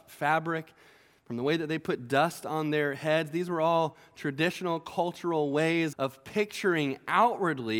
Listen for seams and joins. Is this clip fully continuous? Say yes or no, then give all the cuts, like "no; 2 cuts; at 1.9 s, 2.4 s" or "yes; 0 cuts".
no; 1 cut; at 5.9 s